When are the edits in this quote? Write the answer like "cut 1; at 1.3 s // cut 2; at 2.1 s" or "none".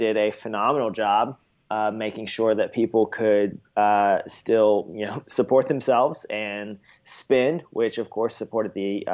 none